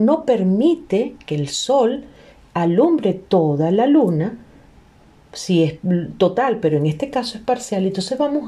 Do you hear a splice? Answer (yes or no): no